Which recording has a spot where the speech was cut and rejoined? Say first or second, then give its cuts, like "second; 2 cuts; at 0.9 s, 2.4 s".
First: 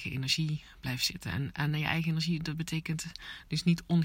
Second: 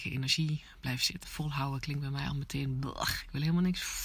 second; 1 cut; at 1.2 s